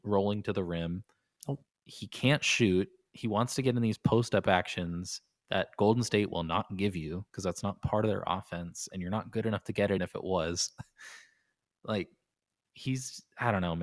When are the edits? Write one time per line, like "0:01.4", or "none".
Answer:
0:10.0